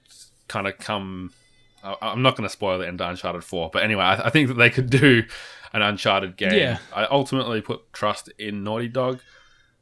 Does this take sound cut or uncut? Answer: cut